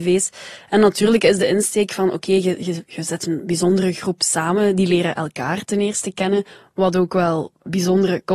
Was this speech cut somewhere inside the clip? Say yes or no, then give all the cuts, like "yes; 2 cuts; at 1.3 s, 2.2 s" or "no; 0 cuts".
no; 0 cuts